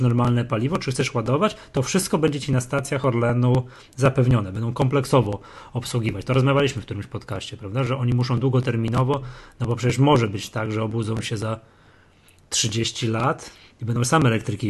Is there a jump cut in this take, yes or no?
no